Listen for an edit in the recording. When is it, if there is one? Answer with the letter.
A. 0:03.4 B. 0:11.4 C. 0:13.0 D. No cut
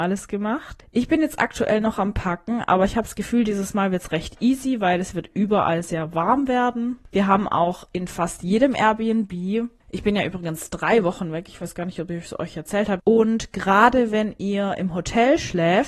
C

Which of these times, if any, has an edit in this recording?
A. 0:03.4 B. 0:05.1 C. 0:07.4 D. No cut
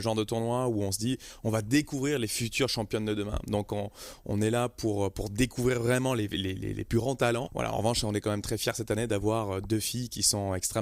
C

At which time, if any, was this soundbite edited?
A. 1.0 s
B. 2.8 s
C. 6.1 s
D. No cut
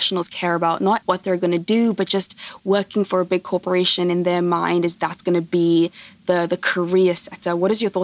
A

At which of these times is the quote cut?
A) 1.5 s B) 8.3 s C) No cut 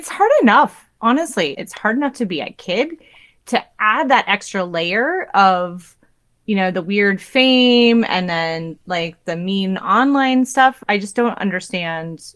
A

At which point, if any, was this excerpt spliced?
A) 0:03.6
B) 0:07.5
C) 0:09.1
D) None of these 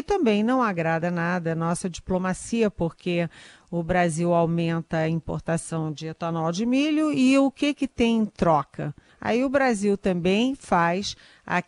C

